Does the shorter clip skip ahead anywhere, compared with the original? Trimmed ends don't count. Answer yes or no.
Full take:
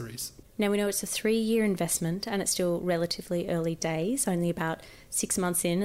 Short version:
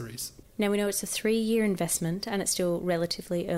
no